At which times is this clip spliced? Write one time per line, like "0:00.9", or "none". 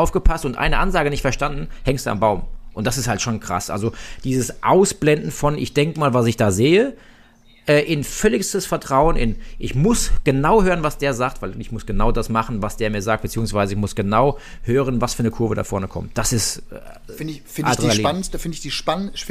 none